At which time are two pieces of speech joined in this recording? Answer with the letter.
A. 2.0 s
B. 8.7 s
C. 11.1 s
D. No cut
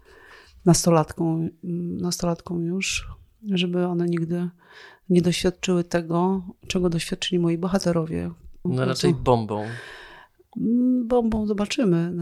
B